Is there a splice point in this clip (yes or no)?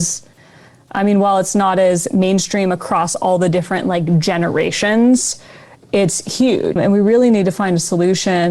yes